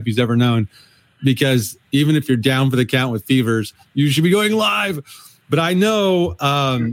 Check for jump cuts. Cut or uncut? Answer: uncut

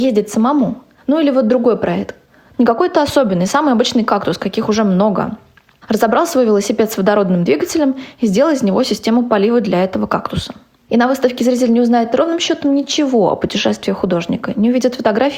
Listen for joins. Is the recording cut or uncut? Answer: cut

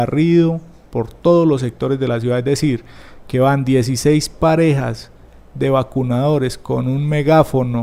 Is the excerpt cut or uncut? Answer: uncut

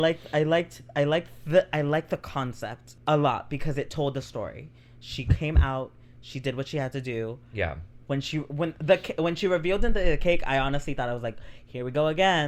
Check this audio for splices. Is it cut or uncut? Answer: cut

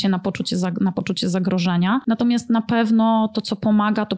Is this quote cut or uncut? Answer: uncut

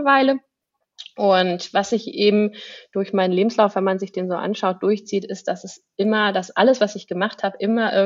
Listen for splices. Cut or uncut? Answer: uncut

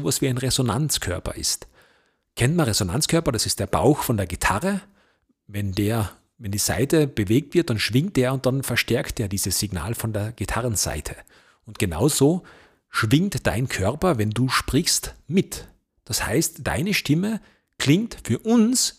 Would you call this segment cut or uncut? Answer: uncut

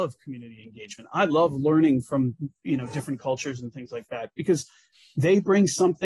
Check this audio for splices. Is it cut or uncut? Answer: uncut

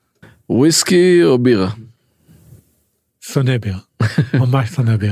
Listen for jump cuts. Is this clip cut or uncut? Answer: uncut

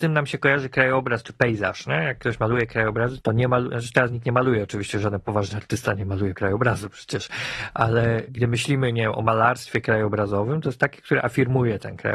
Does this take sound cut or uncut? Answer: cut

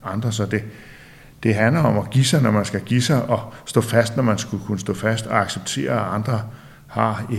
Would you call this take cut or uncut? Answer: uncut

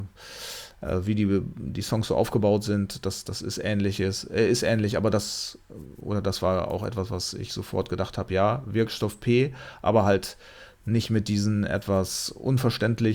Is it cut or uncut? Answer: uncut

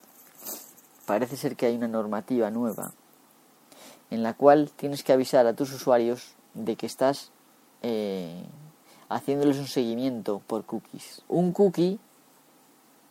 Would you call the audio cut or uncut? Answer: cut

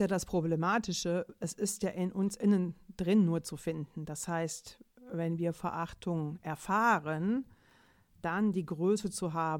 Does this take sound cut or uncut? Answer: uncut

